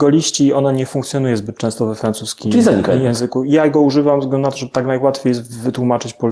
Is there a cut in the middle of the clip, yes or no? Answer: no